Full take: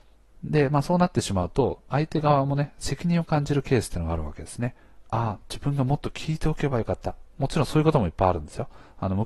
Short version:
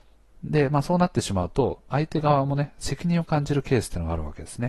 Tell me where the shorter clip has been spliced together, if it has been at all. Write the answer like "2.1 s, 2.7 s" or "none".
none